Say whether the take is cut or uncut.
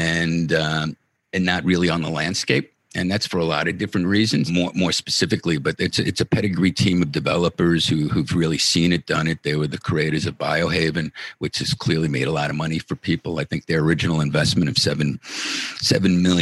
cut